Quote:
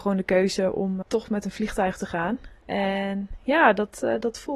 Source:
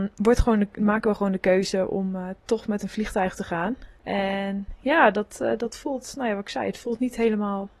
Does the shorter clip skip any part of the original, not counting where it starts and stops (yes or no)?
yes